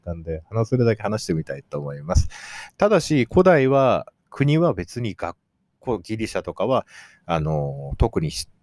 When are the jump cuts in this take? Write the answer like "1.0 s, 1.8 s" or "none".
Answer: 2.7 s

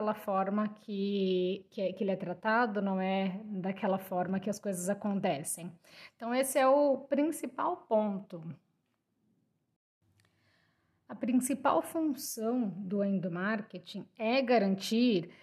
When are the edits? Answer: none

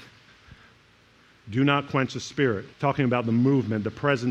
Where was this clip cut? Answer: 2.7 s

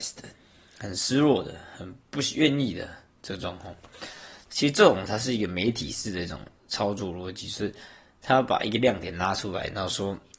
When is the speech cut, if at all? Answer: 4.5 s

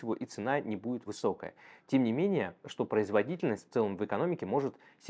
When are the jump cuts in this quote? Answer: 1.1 s, 2.6 s

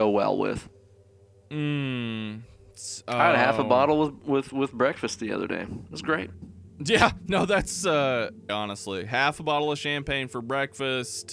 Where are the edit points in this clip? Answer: 8.5 s

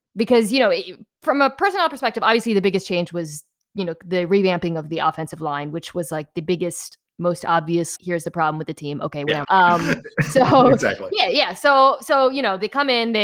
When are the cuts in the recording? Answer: 8.0 s, 9.4 s

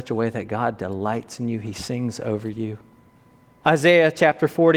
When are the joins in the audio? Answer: 3.6 s

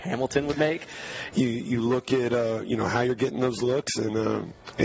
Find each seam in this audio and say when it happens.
1.3 s

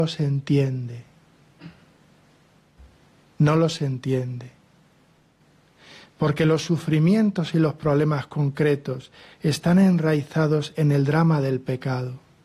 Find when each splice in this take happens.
none

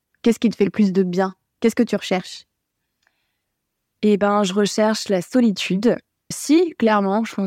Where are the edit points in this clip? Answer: 6.3 s

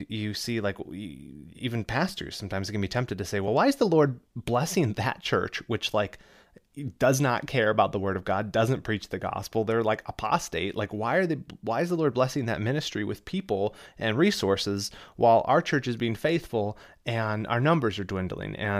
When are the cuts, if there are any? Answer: none

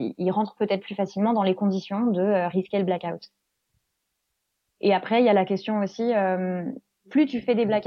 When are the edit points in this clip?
none

